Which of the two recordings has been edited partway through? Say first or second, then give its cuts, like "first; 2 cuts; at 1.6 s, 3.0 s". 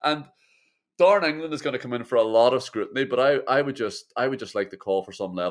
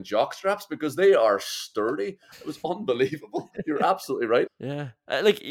second; 1 cut; at 4.5 s